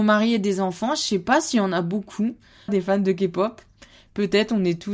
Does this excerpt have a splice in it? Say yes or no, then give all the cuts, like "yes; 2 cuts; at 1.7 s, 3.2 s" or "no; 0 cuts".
yes; 1 cut; at 2.7 s